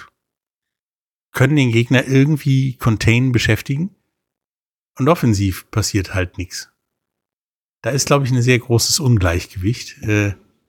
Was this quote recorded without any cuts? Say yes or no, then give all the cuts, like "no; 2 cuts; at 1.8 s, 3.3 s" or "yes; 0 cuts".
yes; 0 cuts